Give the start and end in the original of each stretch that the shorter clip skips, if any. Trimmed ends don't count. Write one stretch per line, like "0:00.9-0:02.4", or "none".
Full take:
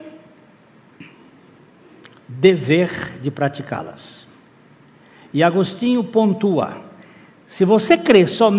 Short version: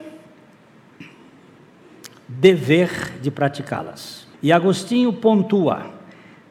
0:04.3-0:05.3